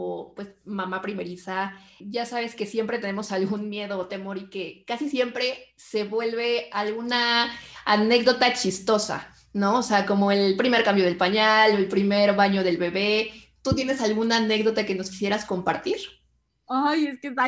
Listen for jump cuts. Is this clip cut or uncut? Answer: uncut